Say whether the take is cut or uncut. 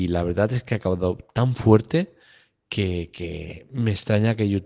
uncut